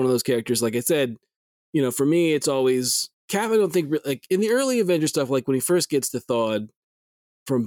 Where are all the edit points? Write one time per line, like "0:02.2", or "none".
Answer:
0:03.1